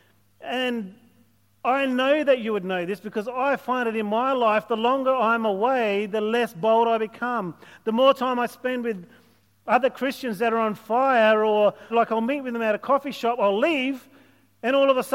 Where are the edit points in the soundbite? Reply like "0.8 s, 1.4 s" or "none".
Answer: 11.9 s

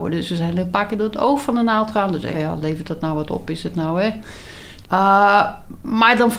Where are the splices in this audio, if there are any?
2.3 s, 4.8 s

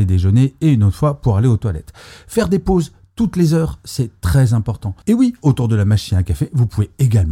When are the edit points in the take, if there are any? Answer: 5.0 s

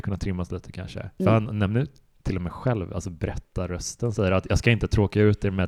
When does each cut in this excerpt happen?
none

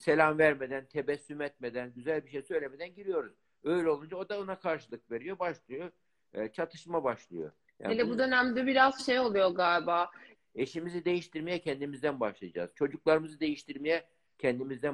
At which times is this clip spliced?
7.6 s, 10.4 s

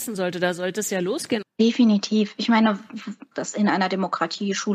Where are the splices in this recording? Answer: 1.4 s, 3.3 s

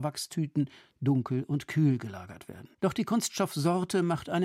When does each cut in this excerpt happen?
2.7 s

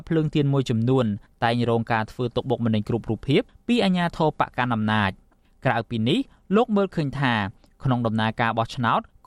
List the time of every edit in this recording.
none

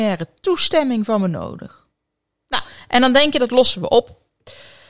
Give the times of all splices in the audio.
none

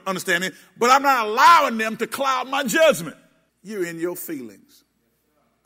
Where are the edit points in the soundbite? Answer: 3.5 s

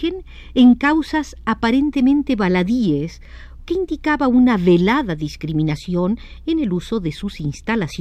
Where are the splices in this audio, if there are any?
3.6 s

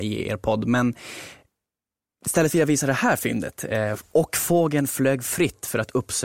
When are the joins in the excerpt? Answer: none

